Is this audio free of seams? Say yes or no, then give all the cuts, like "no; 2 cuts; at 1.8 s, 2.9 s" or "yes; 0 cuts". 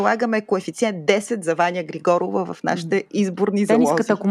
yes; 0 cuts